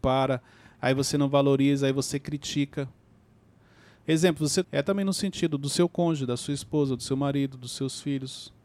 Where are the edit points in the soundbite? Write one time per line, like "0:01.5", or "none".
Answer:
0:04.6